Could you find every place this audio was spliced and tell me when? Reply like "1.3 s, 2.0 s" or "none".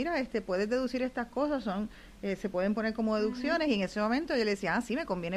none